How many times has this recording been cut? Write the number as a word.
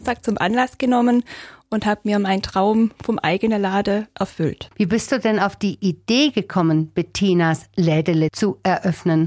one